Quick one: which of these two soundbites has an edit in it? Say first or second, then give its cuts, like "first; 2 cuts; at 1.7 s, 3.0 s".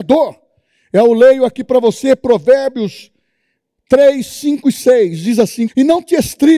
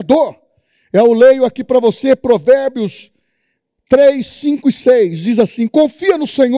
first; 1 cut; at 5.7 s